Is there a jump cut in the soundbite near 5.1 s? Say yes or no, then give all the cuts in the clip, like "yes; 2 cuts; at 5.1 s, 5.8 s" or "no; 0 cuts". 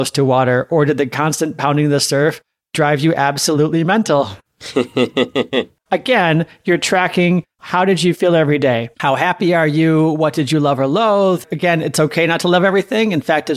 no; 1 cut; at 8.9 s